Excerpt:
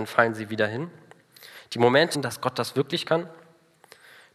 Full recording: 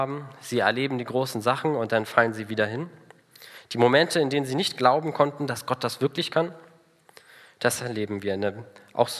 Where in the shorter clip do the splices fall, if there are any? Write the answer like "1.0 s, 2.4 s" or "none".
2.1 s